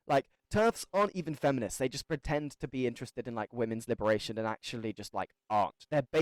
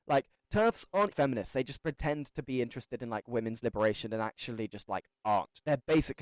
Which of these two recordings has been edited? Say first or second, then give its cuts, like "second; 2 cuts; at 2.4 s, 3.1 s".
second; 1 cut; at 1.1 s